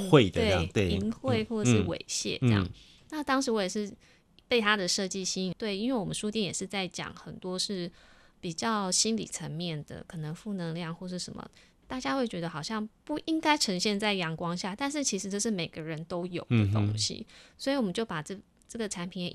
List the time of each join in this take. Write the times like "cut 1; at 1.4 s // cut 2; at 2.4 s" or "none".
cut 1; at 5.5 s